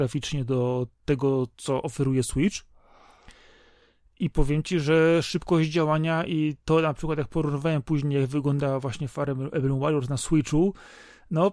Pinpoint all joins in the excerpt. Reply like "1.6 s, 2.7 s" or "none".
none